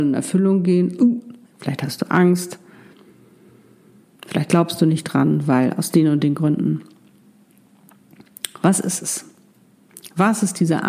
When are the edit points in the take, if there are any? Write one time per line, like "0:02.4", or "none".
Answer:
none